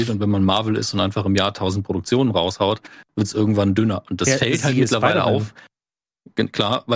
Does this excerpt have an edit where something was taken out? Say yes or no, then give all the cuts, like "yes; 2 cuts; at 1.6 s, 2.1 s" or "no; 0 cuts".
no; 0 cuts